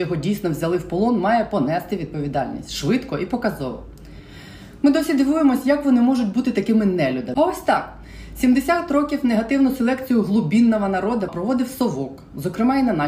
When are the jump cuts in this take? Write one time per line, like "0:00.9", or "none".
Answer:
0:11.3